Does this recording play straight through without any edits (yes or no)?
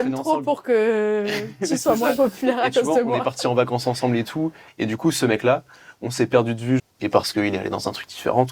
no